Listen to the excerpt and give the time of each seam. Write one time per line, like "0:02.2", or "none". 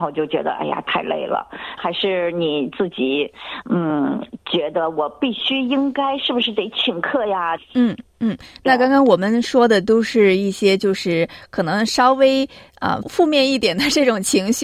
0:01.8
0:07.6
0:13.0